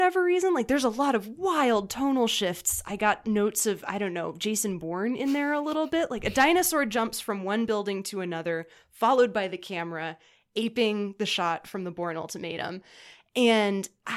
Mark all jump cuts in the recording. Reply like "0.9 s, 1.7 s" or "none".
none